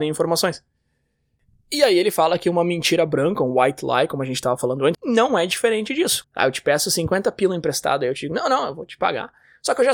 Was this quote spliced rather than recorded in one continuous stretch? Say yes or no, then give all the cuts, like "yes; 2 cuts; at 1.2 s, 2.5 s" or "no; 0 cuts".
yes; 2 cuts; at 4.9 s, 6.2 s